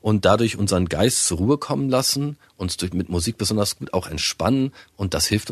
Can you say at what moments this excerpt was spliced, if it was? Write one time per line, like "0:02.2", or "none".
none